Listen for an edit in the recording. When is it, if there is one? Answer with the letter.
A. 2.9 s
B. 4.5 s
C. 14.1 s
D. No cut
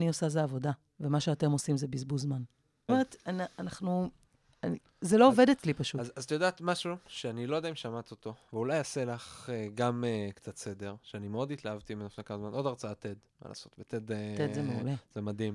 A